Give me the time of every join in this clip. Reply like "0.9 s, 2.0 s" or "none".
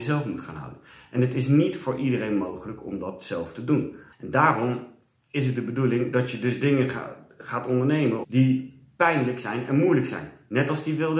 4.1 s, 8.2 s